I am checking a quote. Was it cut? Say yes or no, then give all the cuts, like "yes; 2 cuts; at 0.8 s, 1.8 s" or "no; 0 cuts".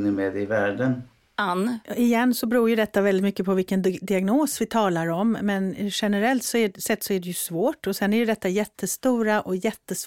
yes; 1 cut; at 1.8 s